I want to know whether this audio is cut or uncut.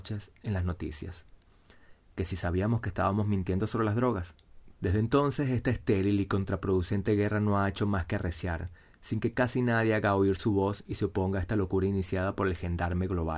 cut